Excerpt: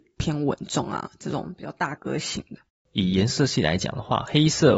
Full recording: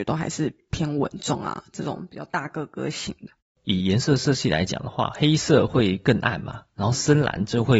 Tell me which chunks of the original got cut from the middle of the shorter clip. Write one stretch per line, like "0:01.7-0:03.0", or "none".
0:02.5-0:02.7
0:04.0-0:04.2